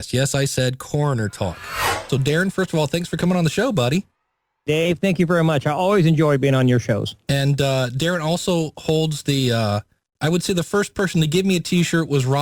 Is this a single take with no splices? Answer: no; 1 cut; at 10.2 s

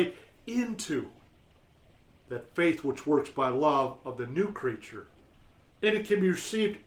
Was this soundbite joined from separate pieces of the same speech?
yes; 1 cut; at 5.7 s

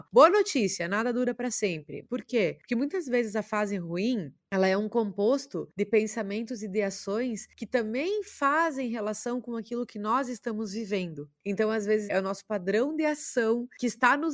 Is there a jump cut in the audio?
yes; 2 cuts; at 2.0 s, 12.1 s

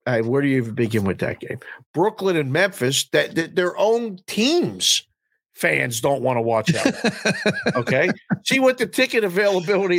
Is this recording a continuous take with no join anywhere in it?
yes; 0 cuts

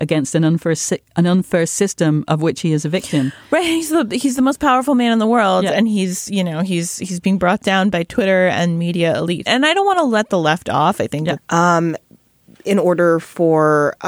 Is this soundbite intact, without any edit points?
no; 2 cuts; at 9.5 s, 11.4 s

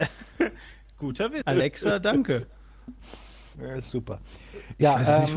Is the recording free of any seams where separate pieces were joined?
no; 2 cuts; at 1.4 s, 3.5 s

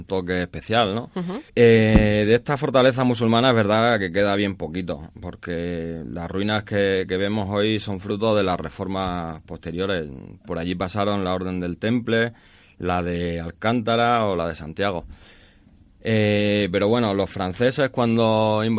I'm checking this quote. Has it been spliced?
yes; 1 cut; at 1.5 s

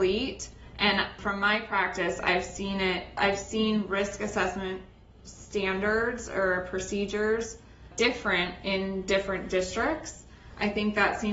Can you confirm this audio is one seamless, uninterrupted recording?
yes; 0 cuts

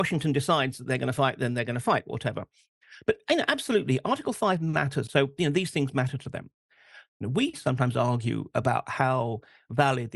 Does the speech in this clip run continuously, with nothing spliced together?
no; 2 cuts; at 5.1 s, 7.1 s

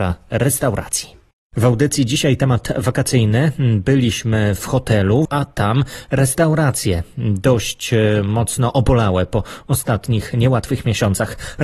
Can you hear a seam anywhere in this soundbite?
yes; 2 cuts; at 1.4 s, 5.3 s

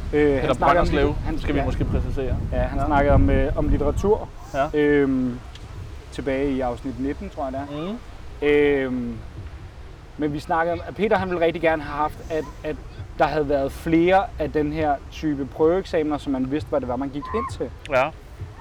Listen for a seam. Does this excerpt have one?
no; 0 cuts

